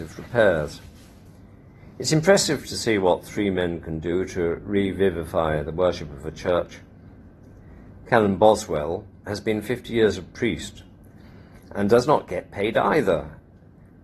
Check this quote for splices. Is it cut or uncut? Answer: cut